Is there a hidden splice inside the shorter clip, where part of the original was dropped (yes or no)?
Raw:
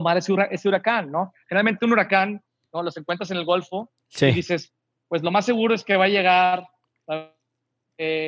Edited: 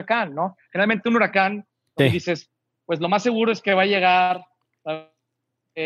yes